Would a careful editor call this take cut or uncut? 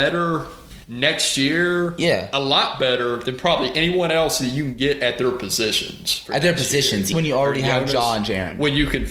cut